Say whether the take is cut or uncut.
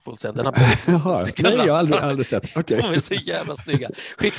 uncut